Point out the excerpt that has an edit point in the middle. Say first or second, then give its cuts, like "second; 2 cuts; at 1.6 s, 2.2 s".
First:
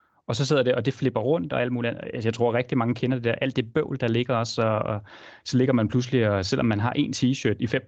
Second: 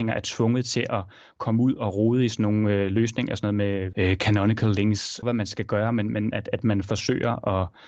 second; 3 cuts; at 3.9 s, 5.2 s, 6.3 s